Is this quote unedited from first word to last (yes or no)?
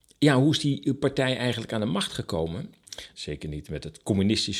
no